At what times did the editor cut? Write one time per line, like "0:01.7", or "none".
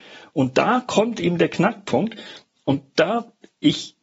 none

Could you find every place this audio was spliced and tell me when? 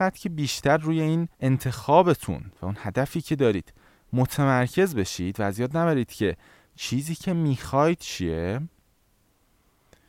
0:01.3

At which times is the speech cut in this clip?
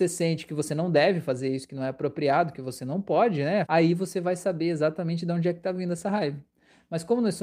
0:03.6

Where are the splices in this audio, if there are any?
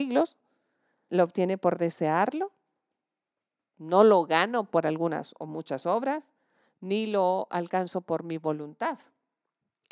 0:01.1

